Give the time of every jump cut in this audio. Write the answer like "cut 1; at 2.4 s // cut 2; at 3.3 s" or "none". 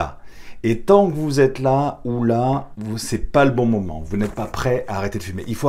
cut 1; at 2.8 s